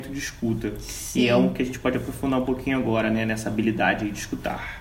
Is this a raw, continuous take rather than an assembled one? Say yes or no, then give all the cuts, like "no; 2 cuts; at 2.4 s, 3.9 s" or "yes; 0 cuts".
yes; 0 cuts